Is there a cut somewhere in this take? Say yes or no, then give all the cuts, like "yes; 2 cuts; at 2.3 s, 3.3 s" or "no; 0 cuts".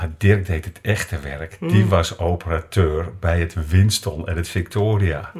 no; 0 cuts